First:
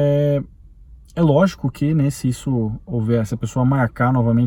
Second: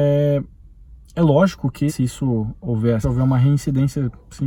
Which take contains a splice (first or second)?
second